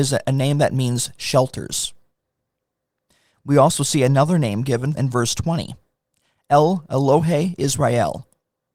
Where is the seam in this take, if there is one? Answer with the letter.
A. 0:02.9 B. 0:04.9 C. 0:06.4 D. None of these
B